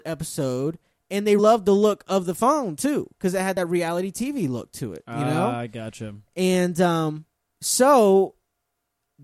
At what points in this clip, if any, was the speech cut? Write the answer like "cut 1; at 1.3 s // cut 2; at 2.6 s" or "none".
cut 1; at 1.4 s